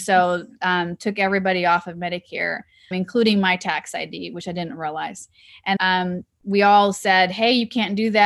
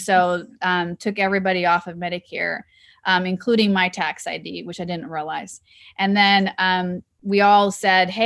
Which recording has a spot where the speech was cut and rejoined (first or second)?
first